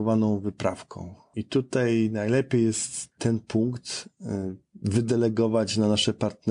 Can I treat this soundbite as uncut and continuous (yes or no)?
yes